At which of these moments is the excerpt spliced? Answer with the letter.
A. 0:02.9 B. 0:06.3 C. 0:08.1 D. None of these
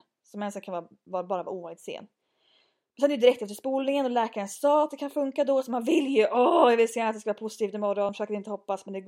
D